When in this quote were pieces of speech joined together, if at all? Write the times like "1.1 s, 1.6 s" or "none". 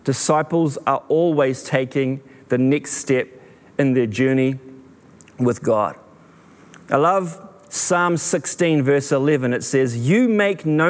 none